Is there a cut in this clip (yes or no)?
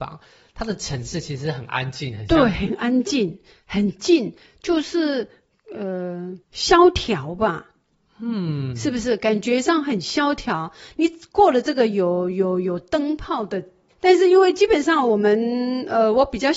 yes